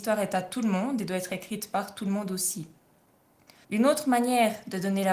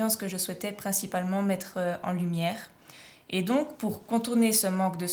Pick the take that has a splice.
first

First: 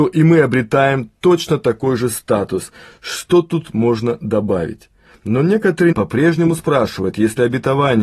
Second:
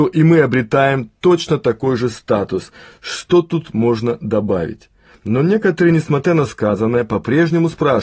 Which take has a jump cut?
first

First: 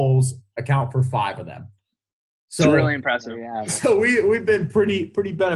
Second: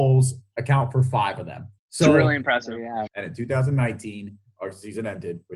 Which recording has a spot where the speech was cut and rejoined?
second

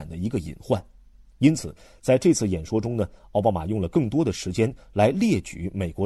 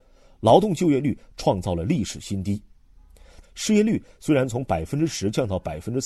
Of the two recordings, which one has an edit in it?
second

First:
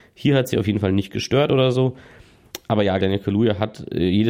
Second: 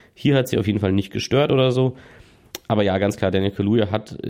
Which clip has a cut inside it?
first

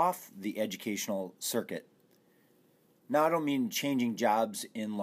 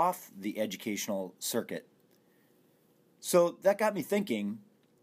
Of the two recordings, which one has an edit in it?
first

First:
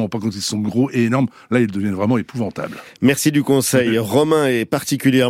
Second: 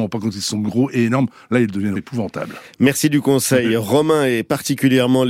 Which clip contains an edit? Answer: second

